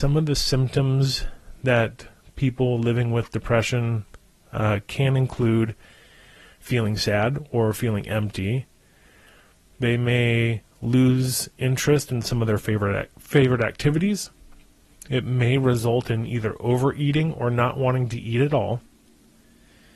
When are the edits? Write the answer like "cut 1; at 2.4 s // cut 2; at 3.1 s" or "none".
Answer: none